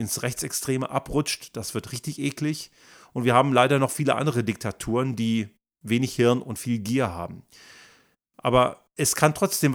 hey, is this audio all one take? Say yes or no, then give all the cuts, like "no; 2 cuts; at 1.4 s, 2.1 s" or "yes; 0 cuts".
yes; 0 cuts